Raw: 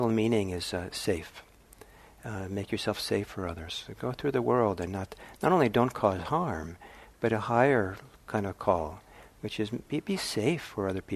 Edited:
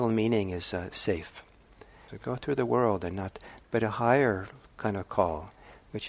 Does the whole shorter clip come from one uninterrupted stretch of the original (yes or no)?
no